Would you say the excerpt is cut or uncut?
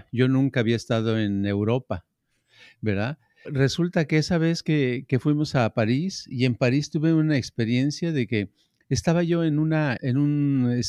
cut